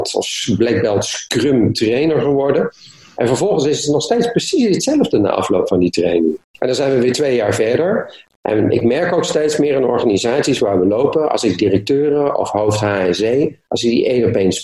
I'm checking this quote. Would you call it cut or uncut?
cut